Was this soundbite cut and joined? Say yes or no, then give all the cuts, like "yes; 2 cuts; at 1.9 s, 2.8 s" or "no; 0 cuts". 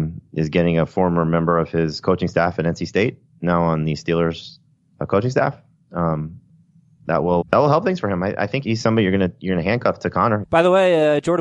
yes; 3 cuts; at 7.4 s, 8.6 s, 10.4 s